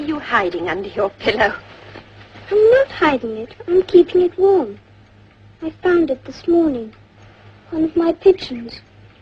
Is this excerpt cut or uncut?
uncut